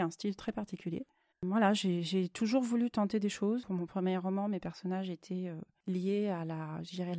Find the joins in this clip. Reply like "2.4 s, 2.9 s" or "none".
1.3 s